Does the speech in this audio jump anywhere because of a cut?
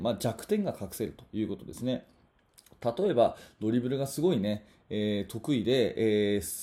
no; 0 cuts

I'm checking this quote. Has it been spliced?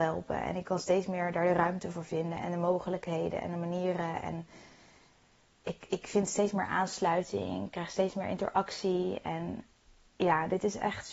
no; 0 cuts

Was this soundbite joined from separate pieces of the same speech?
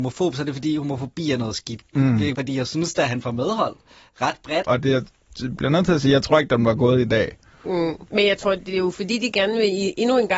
yes; 2 cuts; at 2.3 s, 4.6 s

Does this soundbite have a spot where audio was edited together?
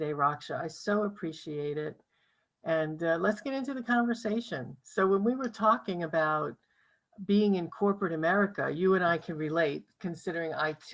no; 0 cuts

